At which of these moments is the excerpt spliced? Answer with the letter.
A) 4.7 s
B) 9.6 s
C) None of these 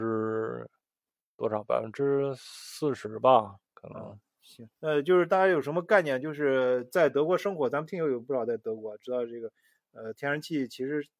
A